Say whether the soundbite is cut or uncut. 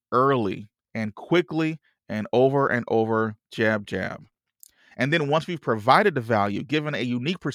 cut